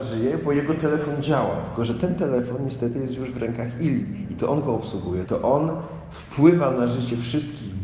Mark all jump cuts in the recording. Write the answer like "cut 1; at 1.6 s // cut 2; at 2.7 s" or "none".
cut 1; at 5.3 s